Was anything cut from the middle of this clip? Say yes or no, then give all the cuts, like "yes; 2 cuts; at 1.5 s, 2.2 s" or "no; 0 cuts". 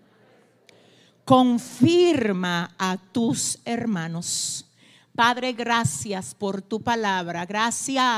no; 0 cuts